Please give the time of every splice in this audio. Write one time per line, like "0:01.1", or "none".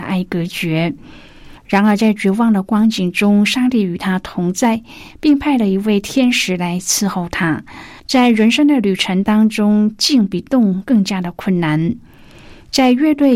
0:01.6
0:08.0